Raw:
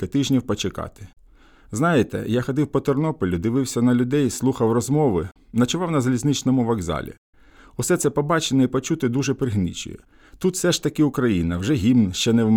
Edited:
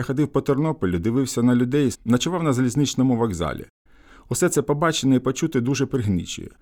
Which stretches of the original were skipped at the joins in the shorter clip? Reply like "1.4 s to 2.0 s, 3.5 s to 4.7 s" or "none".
4.3 s to 5.4 s